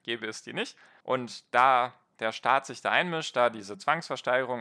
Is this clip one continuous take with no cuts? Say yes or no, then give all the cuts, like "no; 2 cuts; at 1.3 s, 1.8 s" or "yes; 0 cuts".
no; 1 cut; at 1.0 s